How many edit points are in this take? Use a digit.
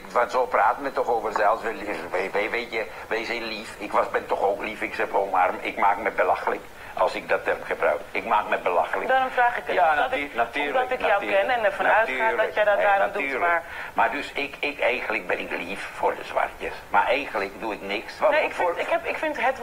2